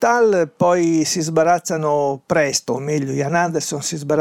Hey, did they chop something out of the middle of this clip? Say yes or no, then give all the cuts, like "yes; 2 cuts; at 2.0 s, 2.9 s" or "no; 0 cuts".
no; 0 cuts